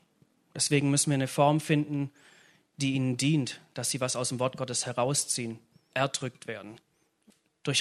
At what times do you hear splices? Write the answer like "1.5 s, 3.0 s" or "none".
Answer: 5.9 s